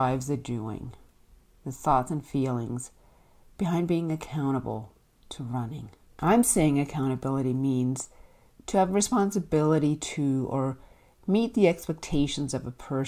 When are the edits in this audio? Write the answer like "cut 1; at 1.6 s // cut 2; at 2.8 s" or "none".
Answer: cut 1; at 6.2 s